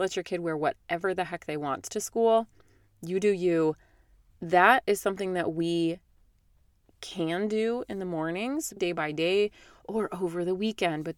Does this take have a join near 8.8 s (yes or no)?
yes